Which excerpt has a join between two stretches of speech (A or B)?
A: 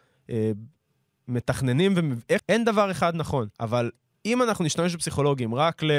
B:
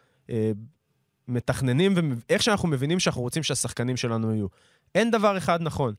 A